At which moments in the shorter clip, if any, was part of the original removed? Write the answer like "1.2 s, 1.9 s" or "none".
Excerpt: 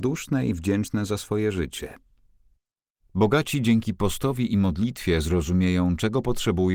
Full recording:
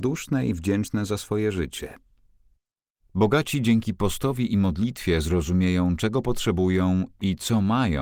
none